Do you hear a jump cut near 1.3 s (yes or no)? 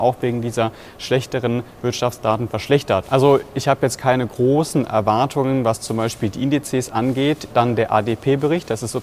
no